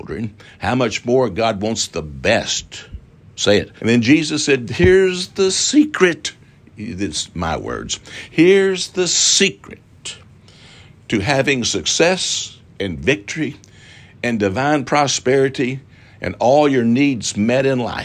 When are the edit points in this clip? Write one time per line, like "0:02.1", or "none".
0:03.8